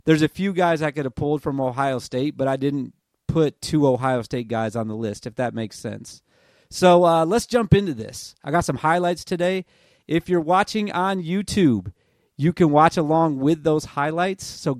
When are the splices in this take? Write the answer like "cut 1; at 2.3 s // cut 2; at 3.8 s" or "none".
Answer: none